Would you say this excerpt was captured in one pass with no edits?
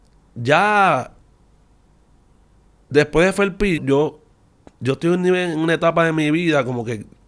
no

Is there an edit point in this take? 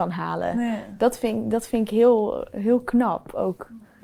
no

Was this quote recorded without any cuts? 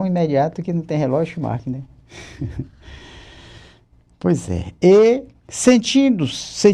yes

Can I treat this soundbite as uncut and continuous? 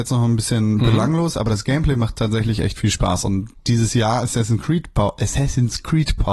yes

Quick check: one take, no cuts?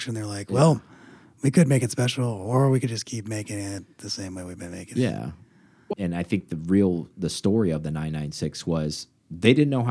no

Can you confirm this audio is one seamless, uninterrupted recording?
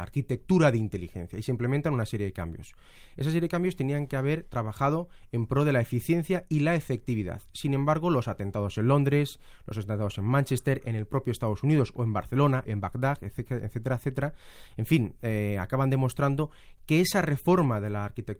no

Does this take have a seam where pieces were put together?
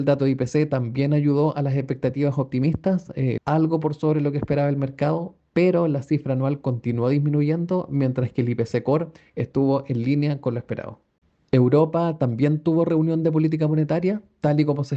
yes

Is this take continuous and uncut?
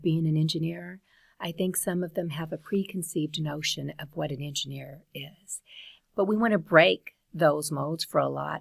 no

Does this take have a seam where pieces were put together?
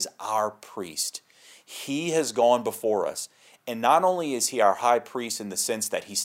no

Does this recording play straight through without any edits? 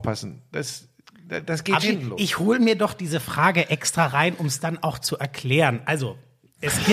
no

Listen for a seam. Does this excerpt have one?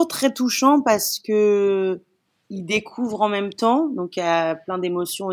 no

